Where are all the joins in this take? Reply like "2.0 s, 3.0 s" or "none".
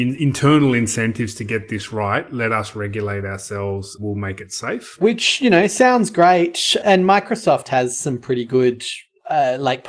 none